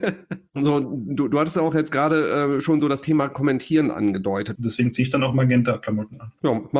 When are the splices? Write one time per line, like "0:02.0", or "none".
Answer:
0:04.6